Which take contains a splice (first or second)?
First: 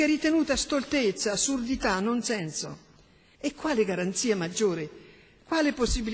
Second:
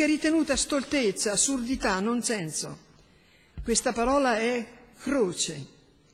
first